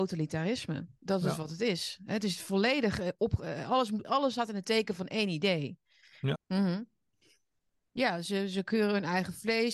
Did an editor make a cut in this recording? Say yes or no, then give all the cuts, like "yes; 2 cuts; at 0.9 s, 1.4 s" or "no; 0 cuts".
yes; 2 cuts; at 4.0 s, 6.4 s